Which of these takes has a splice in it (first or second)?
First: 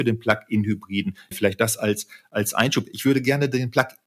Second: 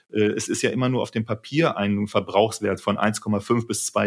first